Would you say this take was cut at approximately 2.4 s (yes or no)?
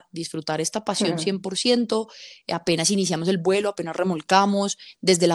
no